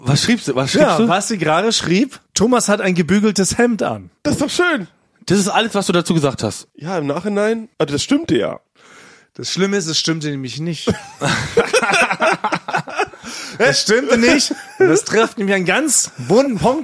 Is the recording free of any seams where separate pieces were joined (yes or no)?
yes